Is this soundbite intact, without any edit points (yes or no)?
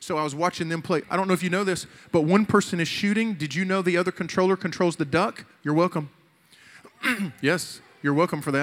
no